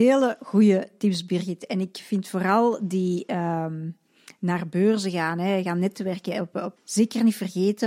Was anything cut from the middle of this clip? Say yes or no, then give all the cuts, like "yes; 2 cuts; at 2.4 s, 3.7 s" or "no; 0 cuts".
yes; 1 cut; at 6.8 s